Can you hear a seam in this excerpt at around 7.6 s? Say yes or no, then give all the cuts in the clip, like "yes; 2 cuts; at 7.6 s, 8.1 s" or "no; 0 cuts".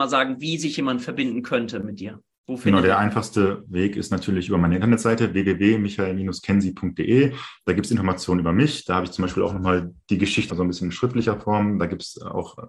no; 1 cut; at 10.5 s